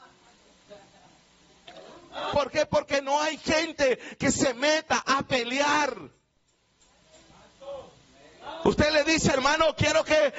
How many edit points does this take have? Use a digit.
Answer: 1